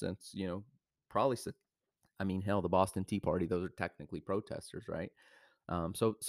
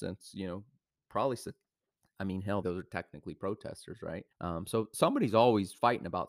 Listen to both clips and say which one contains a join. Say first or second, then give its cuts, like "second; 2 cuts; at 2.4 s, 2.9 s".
second; 2 cuts; at 2.6 s, 4.3 s